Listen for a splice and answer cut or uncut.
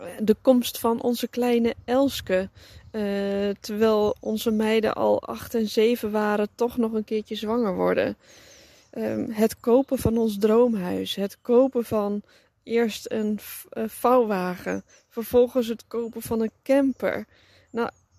uncut